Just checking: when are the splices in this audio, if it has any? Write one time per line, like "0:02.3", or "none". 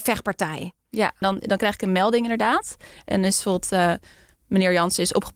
0:01.2